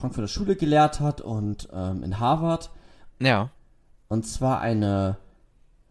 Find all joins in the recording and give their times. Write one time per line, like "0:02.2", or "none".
0:03.1

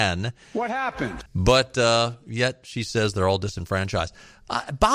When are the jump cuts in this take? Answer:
0:01.3

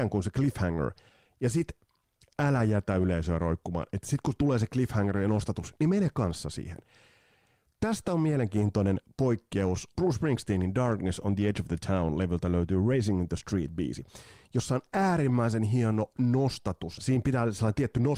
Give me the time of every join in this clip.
0:10.0
0:17.0

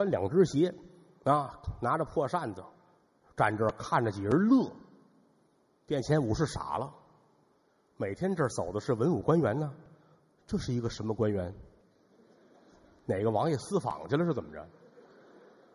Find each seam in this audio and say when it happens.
none

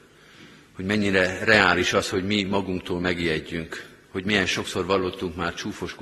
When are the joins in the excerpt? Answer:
none

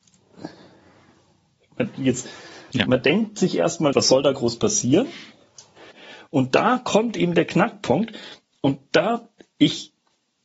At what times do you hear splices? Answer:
0:03.9
0:05.9

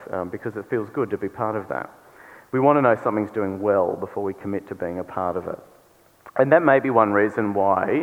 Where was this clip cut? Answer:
none

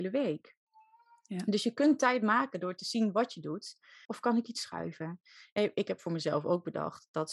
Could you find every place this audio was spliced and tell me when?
0:04.1

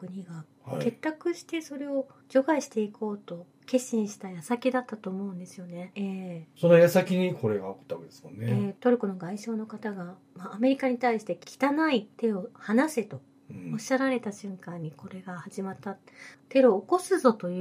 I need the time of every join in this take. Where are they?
0:05.9
0:16.3

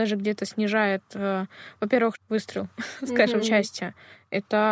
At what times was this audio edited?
0:02.1
0:03.4

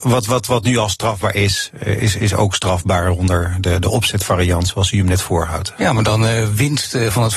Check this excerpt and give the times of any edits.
none

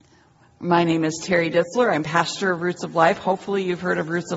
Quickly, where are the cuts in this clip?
none

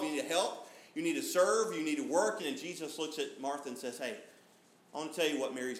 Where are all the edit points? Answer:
0:02.4

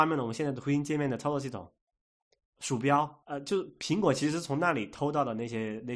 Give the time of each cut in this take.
0:03.2

